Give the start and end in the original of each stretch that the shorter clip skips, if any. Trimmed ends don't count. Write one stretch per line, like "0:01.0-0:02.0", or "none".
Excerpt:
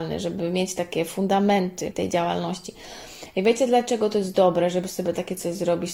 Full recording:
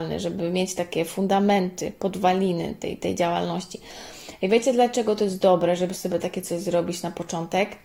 0:01.9-0:03.0